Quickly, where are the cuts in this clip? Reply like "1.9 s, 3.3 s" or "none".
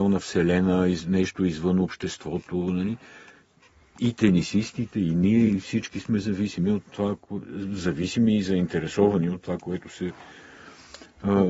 none

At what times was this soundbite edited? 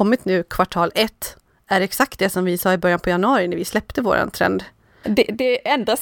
5.0 s

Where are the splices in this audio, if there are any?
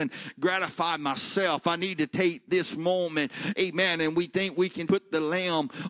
4.9 s

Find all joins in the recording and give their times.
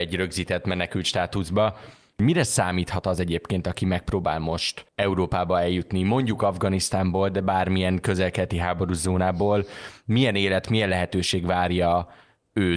4.9 s

